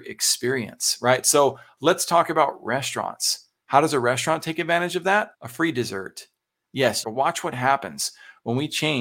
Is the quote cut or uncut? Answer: cut